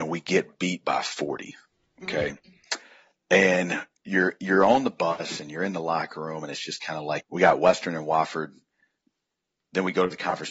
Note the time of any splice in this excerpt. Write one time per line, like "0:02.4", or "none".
0:07.2

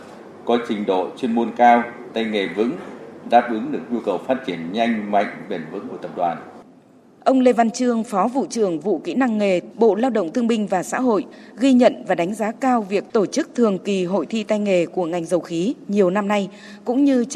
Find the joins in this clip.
0:09.7

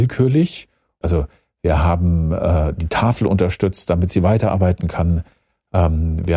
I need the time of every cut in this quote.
0:01.0

